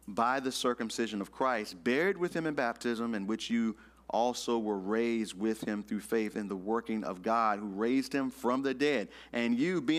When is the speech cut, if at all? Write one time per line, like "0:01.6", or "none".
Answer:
none